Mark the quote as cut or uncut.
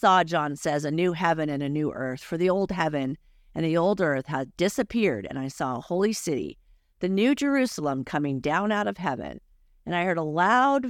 uncut